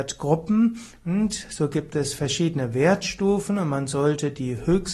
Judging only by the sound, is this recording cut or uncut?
uncut